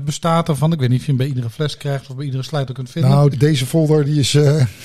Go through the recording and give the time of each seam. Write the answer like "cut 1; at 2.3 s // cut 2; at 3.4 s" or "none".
cut 1; at 3.3 s